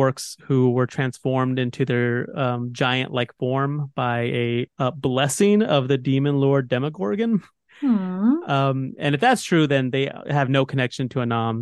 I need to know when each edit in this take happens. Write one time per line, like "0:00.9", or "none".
0:04.7